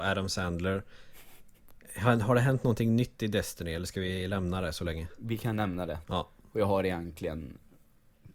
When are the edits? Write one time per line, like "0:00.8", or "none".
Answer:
0:06.0